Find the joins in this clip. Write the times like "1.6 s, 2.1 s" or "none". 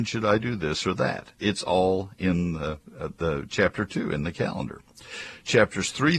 none